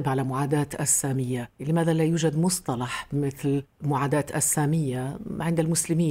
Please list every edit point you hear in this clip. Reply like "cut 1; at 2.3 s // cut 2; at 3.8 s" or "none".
cut 1; at 1.6 s